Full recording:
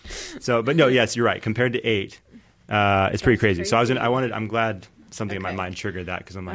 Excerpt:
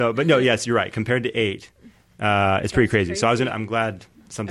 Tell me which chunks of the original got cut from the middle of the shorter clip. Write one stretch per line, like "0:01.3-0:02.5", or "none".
0:04.0-0:04.3